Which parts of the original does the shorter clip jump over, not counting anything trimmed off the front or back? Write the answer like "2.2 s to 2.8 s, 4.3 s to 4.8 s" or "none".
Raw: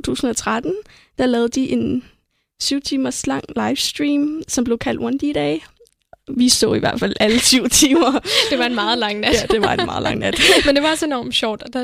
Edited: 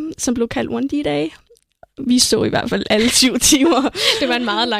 none